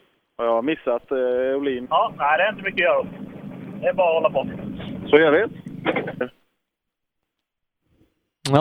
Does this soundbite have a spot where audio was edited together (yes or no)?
yes